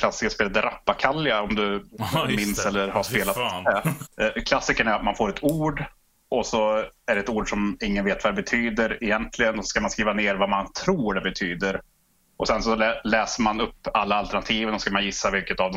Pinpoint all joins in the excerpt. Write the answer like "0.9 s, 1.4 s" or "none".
4.1 s